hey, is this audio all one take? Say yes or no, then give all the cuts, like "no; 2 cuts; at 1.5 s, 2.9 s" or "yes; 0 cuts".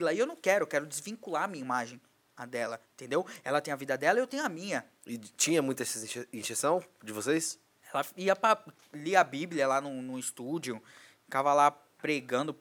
no; 1 cut; at 7.8 s